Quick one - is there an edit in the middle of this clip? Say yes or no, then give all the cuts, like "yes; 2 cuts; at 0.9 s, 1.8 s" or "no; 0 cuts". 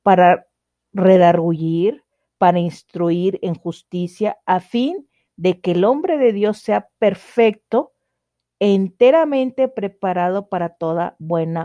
yes; 1 cut; at 2.3 s